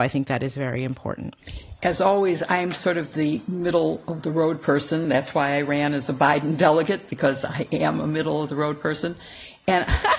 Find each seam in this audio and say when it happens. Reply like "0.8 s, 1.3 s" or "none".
none